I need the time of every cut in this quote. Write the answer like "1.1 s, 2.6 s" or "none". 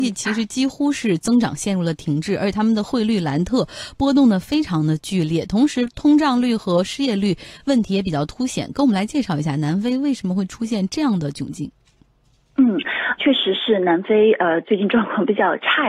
13.2 s